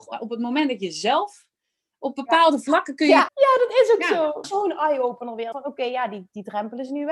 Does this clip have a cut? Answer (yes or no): yes